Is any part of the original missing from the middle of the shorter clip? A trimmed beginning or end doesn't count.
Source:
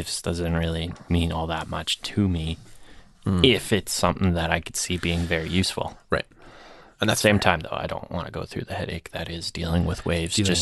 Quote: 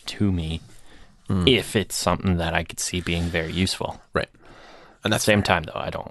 no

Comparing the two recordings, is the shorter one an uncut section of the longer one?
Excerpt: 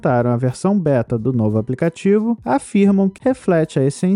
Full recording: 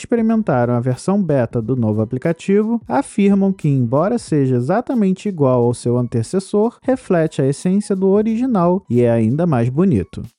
no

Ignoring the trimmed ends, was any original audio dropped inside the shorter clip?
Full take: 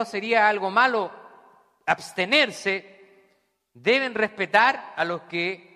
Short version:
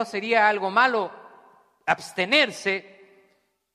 no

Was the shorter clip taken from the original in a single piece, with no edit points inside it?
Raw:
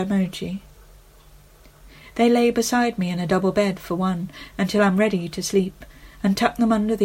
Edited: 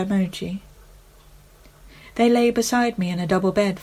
yes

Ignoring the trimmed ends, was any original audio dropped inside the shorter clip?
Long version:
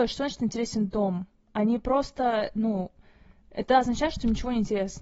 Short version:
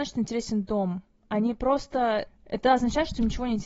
yes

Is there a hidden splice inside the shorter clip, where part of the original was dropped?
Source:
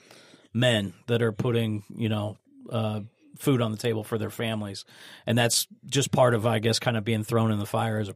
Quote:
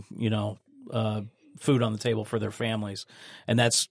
no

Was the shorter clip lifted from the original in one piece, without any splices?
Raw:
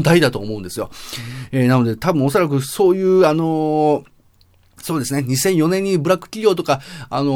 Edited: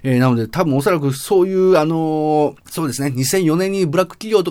no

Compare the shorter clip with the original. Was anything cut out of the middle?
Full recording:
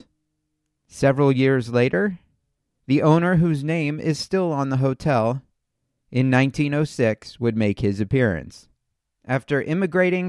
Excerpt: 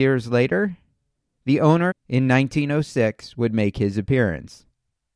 yes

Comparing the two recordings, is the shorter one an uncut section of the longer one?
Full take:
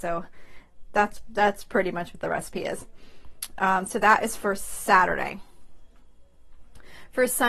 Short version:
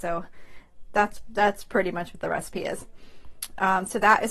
yes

